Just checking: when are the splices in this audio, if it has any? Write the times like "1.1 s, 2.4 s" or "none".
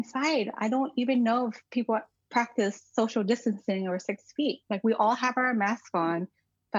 none